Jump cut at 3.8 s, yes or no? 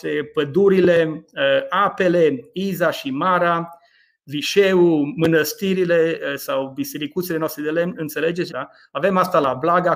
no